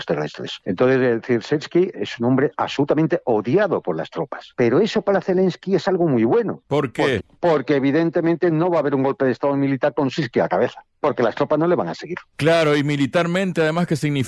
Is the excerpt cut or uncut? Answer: uncut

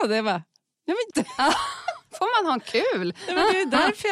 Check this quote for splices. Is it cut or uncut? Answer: cut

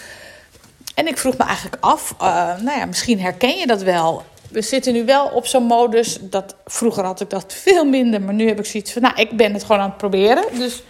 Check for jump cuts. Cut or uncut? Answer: uncut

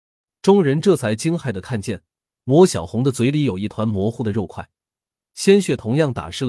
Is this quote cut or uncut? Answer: uncut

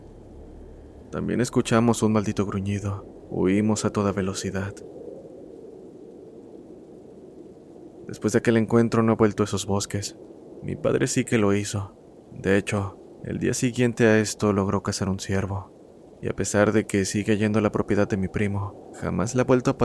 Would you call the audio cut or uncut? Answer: cut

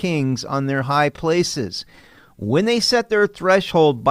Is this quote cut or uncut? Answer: uncut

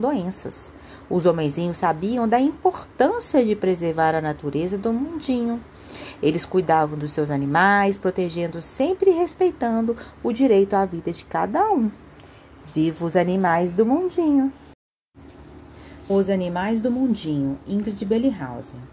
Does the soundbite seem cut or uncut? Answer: uncut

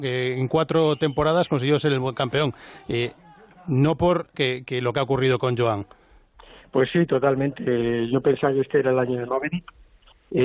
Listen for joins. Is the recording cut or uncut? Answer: cut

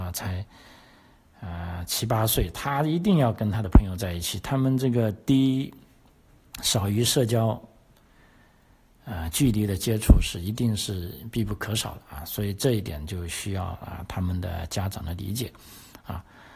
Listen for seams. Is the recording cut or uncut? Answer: uncut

